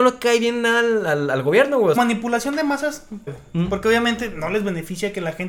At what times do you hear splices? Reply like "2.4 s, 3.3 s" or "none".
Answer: 2.0 s, 3.3 s